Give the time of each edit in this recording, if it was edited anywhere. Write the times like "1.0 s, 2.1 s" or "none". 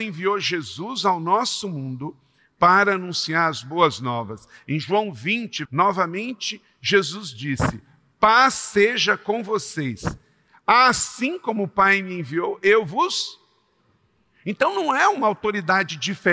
5.7 s

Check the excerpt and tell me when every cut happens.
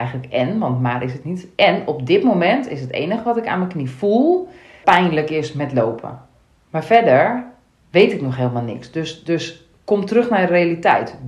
4.8 s

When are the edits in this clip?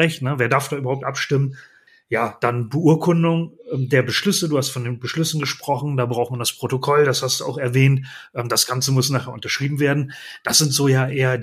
none

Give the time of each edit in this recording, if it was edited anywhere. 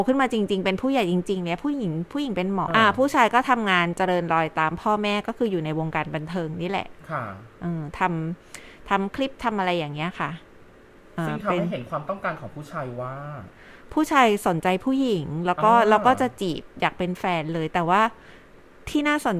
2.7 s

